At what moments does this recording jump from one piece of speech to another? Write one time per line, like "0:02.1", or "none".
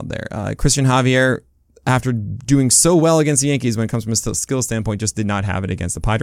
none